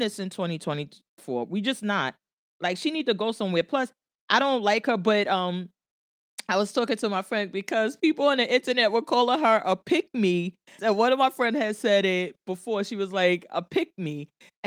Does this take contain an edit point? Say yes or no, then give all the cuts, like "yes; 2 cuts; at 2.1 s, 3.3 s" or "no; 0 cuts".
yes; 1 cut; at 10.8 s